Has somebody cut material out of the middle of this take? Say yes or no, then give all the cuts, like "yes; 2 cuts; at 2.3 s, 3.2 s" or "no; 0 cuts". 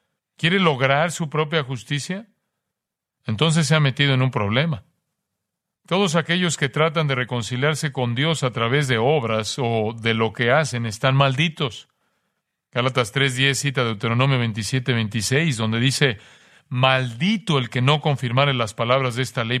no; 0 cuts